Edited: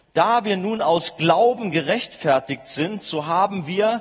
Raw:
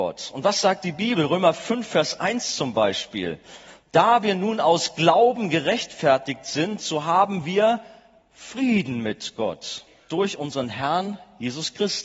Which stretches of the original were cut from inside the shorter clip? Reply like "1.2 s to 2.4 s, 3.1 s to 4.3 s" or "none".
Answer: none